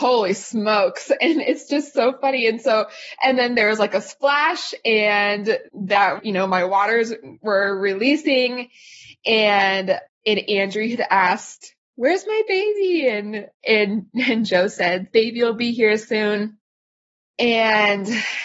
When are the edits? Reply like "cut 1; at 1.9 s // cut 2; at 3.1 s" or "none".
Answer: none